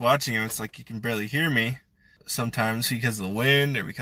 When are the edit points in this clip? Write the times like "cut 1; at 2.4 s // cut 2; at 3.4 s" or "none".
cut 1; at 2.2 s